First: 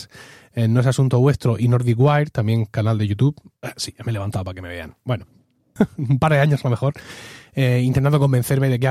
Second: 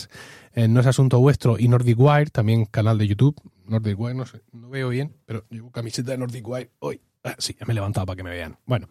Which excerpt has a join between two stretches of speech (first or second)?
first